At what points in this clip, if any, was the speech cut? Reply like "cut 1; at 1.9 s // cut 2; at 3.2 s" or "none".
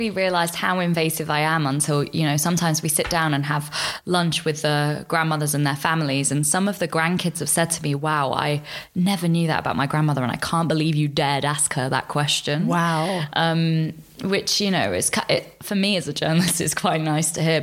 none